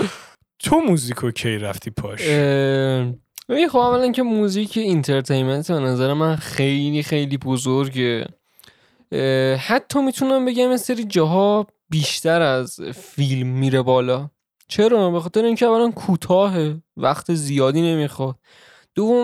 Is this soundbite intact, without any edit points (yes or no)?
yes